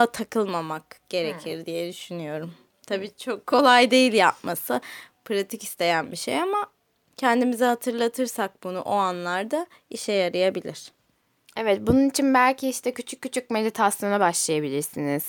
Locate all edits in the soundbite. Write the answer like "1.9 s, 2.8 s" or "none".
none